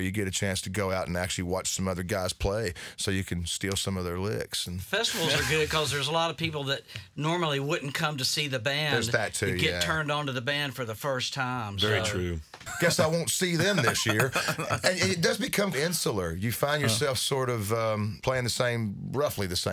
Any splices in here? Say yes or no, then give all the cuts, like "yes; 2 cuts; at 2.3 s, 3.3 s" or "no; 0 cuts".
yes; 2 cuts; at 12.7 s, 15.7 s